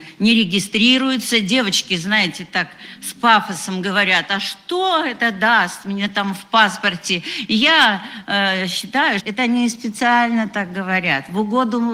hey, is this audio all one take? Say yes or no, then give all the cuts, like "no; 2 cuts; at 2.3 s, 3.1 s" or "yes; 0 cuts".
no; 1 cut; at 9.2 s